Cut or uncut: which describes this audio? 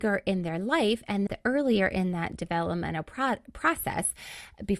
cut